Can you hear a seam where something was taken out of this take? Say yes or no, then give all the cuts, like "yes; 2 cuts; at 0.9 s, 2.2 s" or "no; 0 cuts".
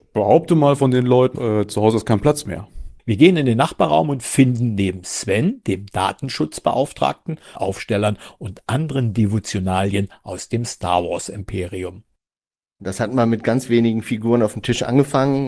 yes; 3 cuts; at 1.3 s, 3.0 s, 7.6 s